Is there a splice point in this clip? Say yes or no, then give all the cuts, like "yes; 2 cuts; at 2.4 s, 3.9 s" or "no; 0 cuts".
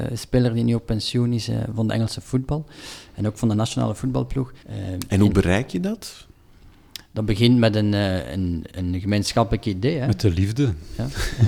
yes; 1 cut; at 4.6 s